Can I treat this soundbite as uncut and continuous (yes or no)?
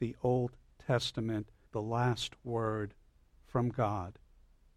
no